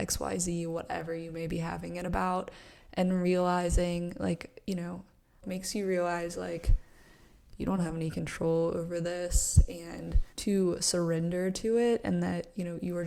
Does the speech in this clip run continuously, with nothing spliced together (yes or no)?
no